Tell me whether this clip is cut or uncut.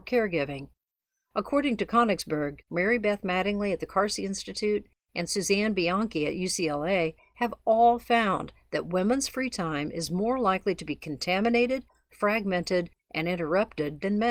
cut